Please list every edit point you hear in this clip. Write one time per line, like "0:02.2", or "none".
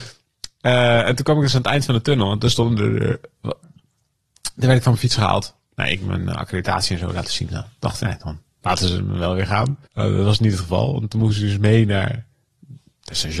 0:03.6
0:09.9